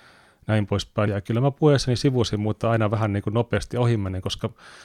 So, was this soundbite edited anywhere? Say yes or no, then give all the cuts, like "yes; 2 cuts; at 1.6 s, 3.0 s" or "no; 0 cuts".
yes; 1 cut; at 1.1 s